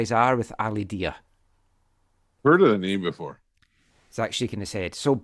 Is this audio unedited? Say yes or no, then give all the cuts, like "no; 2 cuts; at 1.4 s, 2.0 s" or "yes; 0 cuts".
yes; 0 cuts